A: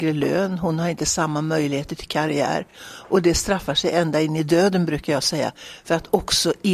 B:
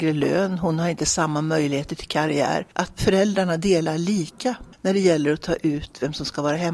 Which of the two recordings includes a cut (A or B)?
B